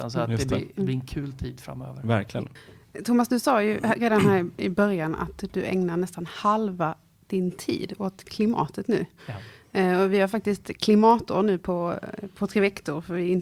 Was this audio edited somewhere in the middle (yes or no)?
no